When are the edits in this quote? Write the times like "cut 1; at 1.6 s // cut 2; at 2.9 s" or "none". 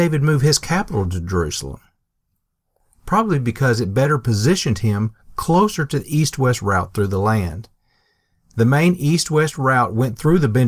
none